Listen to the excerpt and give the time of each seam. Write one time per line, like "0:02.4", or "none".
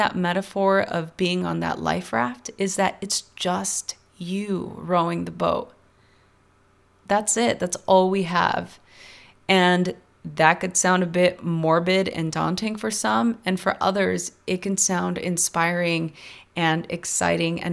none